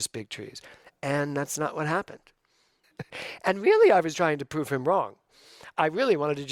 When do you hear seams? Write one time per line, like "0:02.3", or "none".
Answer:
0:02.8
0:04.1